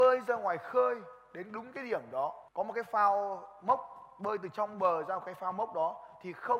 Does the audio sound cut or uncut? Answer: cut